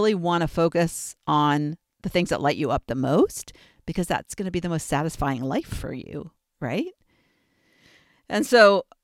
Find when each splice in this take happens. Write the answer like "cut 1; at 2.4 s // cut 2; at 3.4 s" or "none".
none